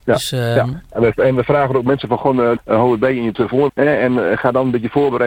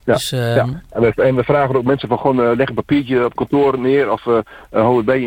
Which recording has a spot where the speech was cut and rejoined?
first; 2 cuts; at 2.6 s, 3.7 s

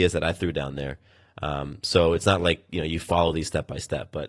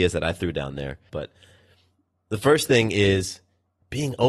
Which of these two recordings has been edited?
second; 1 cut; at 1.1 s

